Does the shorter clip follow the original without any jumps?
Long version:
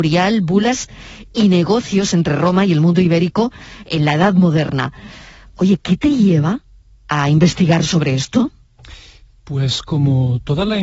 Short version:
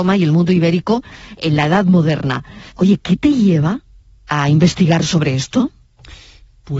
no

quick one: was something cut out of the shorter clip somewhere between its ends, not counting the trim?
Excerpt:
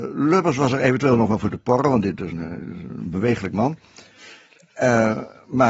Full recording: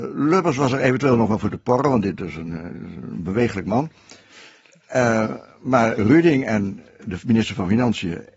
yes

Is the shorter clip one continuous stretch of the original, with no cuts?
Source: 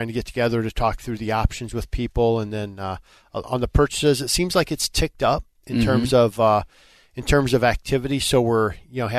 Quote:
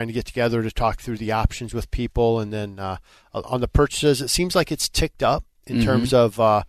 yes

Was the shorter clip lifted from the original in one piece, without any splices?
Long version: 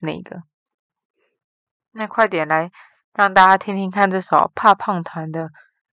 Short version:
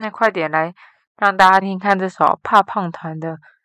no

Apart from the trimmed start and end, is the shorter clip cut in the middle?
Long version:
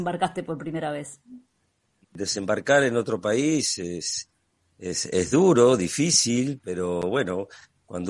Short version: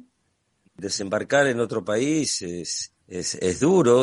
yes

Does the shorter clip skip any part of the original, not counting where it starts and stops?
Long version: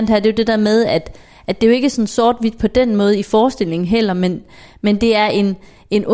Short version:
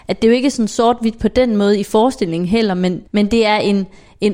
yes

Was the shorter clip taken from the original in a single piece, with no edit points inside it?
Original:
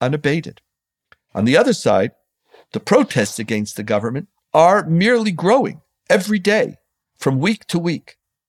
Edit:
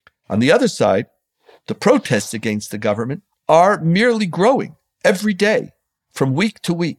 yes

